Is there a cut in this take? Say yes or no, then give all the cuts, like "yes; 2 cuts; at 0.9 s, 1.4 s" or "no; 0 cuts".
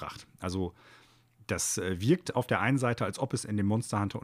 no; 0 cuts